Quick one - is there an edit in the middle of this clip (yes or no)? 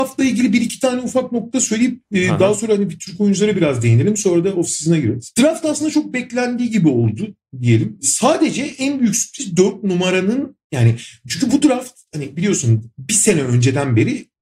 no